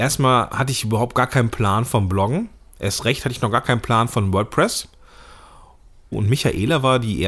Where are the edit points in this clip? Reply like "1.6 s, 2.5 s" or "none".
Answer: 6.1 s